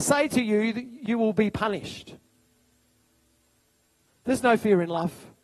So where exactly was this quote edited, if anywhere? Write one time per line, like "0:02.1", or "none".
0:04.1